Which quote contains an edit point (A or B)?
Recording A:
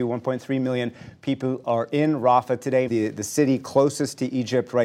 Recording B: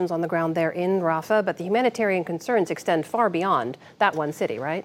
A